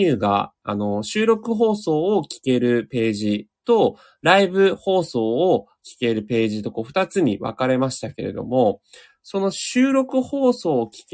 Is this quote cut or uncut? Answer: uncut